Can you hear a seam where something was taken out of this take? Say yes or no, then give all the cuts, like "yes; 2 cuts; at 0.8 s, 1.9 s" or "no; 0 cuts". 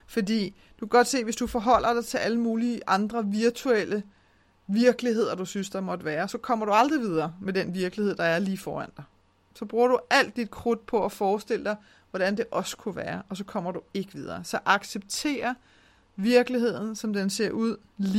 yes; 1 cut; at 6.3 s